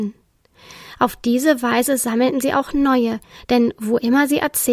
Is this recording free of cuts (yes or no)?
yes